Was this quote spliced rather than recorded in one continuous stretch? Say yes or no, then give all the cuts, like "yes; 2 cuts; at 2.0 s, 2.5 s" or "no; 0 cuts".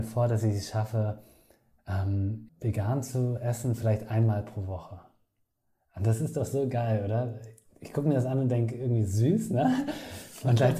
yes; 1 cut; at 2.5 s